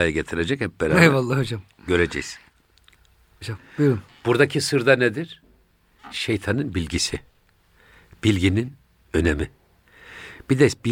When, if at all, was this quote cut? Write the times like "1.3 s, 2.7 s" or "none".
3.4 s